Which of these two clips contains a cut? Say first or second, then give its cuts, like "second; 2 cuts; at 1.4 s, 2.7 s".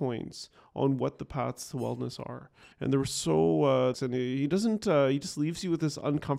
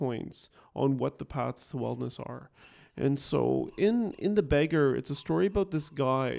first; 2 cuts; at 2.7 s, 3.9 s